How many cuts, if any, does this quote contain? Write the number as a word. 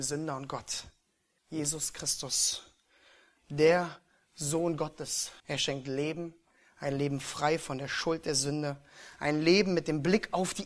two